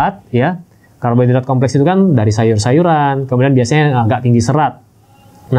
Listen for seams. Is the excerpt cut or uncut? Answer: uncut